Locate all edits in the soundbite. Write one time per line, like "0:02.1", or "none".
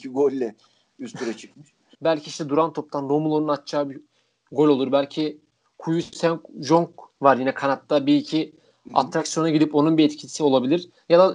0:01.9